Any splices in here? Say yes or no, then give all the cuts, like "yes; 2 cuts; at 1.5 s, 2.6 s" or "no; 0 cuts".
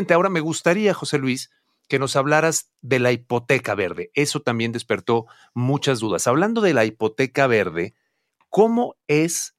no; 0 cuts